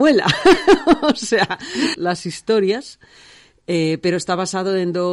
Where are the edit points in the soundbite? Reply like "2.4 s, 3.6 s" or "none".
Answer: 1.9 s